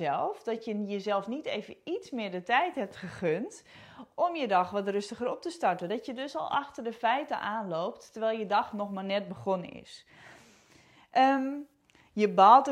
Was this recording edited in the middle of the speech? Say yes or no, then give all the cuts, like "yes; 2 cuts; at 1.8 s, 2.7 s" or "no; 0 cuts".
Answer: no; 0 cuts